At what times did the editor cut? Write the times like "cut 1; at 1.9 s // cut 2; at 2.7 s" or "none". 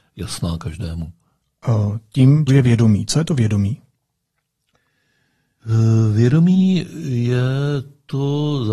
cut 1; at 2.5 s